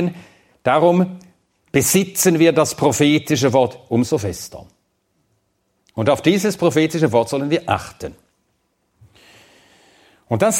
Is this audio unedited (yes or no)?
yes